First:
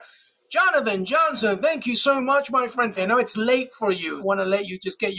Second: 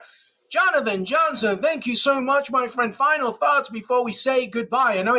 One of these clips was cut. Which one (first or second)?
first